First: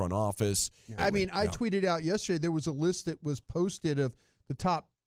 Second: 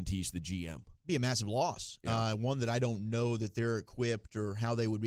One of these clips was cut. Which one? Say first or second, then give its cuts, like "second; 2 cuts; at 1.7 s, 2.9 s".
first; 1 cut; at 1.0 s